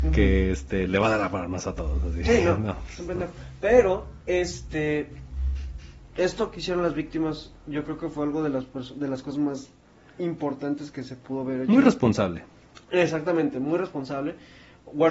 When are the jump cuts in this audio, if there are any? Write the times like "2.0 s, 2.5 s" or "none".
none